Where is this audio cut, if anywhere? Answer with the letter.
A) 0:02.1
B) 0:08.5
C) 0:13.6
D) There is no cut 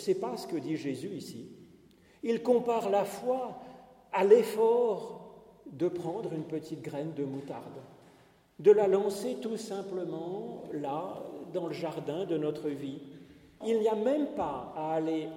C